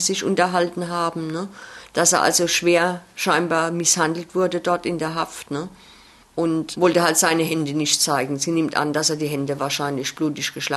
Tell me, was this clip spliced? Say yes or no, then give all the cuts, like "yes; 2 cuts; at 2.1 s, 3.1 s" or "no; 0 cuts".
no; 0 cuts